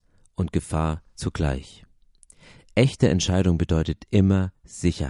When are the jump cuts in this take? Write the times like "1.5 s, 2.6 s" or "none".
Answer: 1.1 s